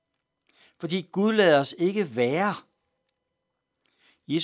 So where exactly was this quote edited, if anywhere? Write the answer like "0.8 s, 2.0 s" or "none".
none